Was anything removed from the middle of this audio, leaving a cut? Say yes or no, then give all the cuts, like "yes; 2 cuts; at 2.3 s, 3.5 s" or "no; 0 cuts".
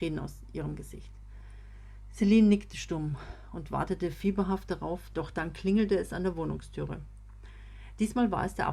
yes; 1 cut; at 5.1 s